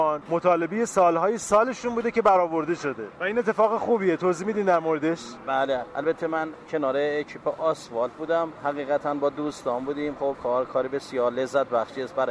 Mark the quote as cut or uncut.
uncut